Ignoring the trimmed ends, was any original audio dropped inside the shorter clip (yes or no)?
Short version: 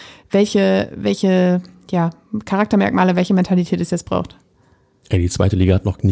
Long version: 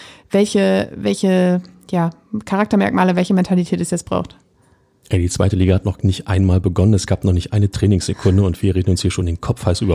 no